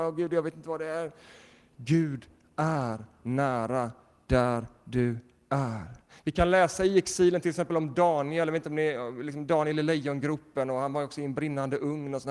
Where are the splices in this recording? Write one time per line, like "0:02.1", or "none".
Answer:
none

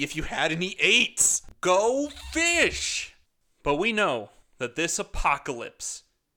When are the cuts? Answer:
none

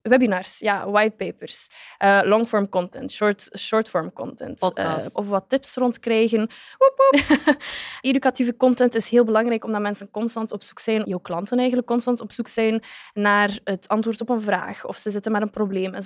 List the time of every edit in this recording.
0:05.1
0:06.7
0:11.0

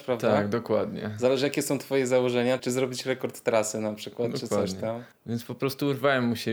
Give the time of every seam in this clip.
0:02.6
0:05.1

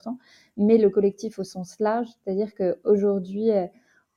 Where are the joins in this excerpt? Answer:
none

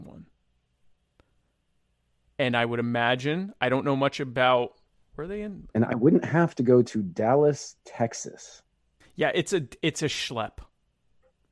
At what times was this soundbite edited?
0:05.7
0:09.0

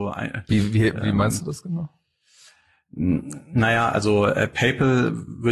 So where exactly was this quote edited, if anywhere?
none

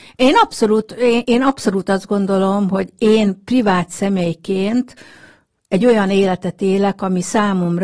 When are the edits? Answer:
0:01.2

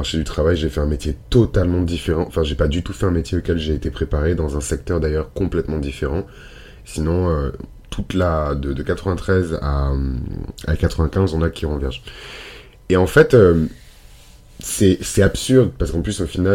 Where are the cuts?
0:06.8

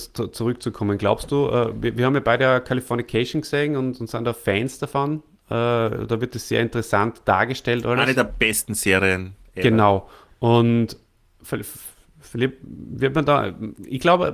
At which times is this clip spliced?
none

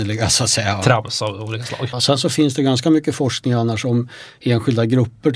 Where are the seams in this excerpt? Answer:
0:01.9

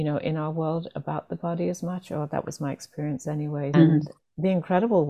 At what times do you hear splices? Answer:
0:03.7

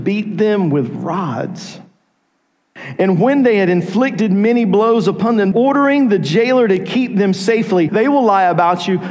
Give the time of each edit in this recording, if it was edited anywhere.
0:05.5
0:07.9

